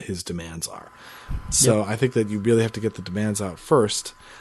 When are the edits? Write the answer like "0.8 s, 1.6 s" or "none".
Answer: none